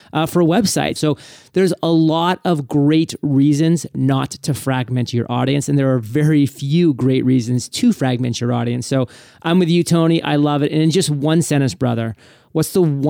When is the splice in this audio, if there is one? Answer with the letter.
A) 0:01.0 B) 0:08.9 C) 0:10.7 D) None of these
A